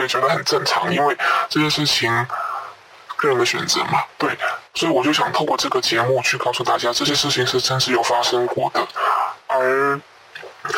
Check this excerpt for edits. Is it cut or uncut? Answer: cut